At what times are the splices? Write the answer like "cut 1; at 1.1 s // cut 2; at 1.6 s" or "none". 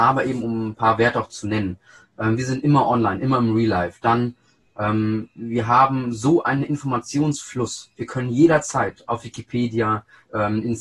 none